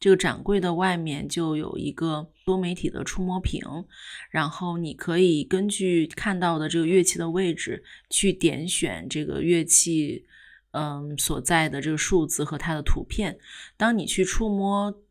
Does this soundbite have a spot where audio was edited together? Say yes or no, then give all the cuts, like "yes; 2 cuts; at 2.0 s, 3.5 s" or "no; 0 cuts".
no; 0 cuts